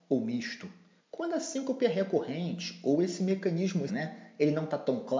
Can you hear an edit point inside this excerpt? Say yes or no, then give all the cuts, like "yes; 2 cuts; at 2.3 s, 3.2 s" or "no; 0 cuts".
yes; 2 cuts; at 1.0 s, 3.9 s